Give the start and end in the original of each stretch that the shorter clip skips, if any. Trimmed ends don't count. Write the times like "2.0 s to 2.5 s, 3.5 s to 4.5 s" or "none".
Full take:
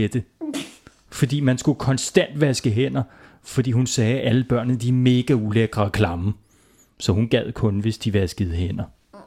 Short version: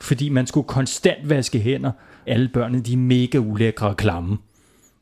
3.4 s to 4.2 s